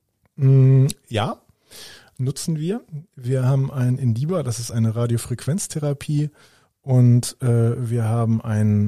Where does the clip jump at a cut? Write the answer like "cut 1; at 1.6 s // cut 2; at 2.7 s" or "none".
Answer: none